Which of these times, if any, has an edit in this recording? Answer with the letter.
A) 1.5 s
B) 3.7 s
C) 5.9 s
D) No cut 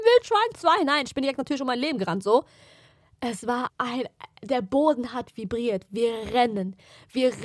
B